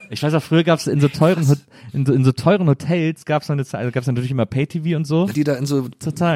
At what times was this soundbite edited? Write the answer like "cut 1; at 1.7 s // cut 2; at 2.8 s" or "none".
cut 1; at 5.3 s